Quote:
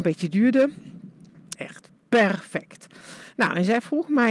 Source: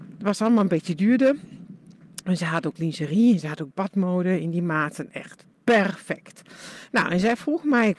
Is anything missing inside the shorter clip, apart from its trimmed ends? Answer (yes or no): yes